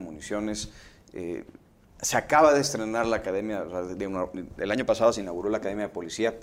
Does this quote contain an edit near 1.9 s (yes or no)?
no